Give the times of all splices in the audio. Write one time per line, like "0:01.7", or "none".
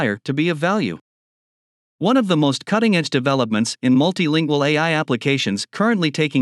none

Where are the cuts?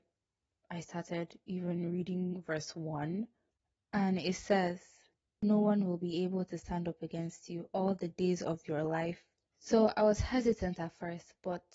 0:09.5

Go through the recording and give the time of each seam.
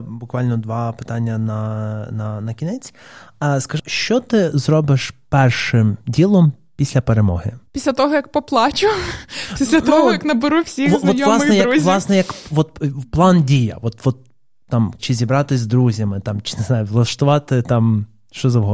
0:03.8
0:07.7
0:15.0

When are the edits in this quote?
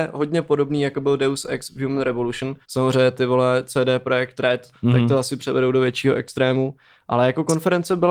0:02.6
0:04.7

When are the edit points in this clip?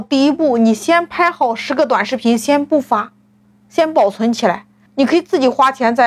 0:04.9

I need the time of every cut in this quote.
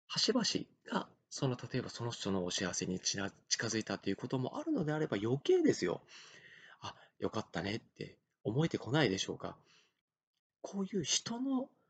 none

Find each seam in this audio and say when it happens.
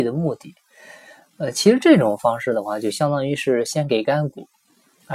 none

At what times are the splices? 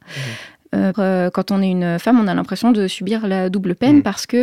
0:00.9

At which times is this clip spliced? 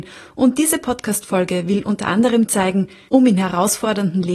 0:03.1

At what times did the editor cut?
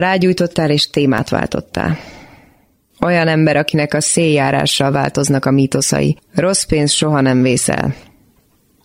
0:02.9

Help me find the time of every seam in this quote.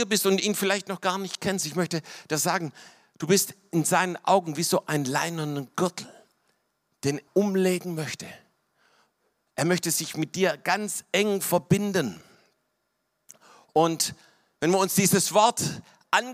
0:07.3

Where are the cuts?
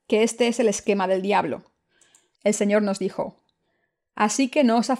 0:02.3

